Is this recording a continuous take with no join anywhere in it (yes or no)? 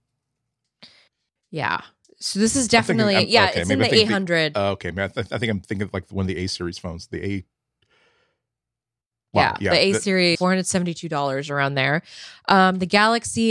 no